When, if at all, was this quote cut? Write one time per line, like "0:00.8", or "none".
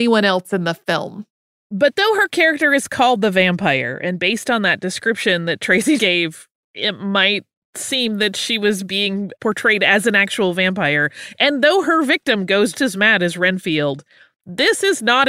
0:06.0
0:12.7